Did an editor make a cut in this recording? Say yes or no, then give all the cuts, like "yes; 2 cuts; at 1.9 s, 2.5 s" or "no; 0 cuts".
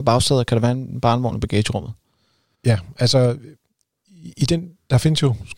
no; 0 cuts